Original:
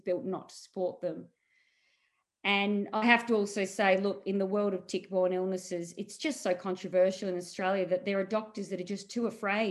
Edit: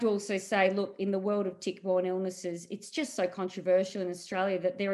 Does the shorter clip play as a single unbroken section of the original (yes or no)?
yes